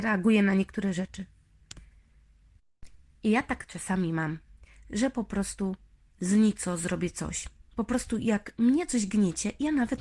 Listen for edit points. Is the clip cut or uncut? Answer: uncut